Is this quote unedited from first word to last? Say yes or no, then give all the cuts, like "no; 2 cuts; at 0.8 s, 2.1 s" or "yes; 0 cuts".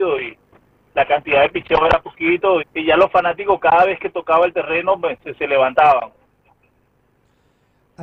no; 1 cut; at 2.6 s